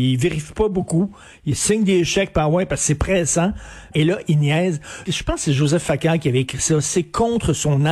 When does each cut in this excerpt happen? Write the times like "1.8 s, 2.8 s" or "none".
3.9 s, 5.1 s

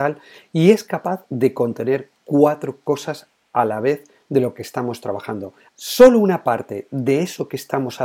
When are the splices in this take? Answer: 5.7 s

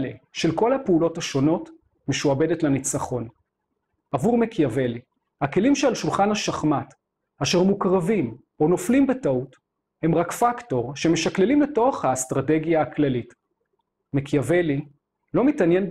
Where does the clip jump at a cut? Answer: 4.0 s

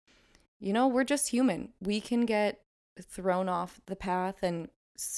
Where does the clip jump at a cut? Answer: none

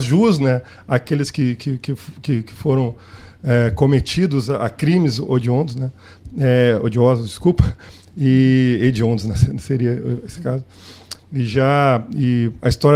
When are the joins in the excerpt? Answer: 11.2 s

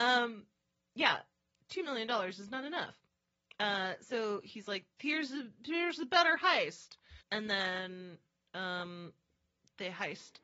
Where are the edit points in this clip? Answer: 7.2 s

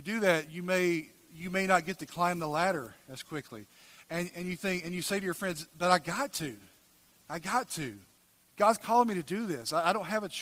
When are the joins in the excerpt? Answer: 4.0 s

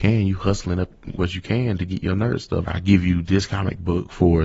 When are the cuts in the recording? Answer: 2.7 s

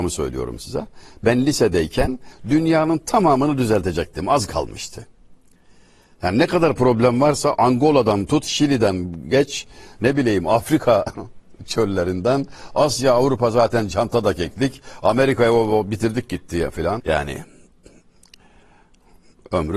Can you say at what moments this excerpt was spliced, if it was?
9.9 s, 17.0 s

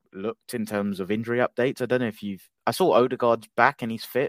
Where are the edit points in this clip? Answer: none

